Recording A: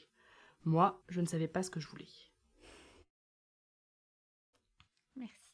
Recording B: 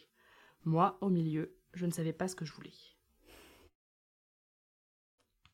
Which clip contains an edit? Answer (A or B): A